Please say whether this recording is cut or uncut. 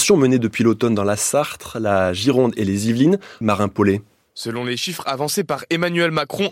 cut